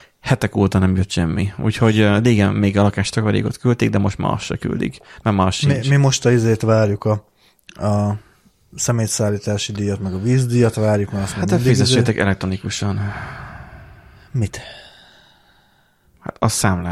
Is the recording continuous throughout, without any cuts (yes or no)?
yes